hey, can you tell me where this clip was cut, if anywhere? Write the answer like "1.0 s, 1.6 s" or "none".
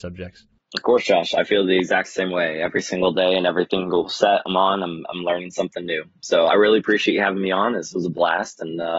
none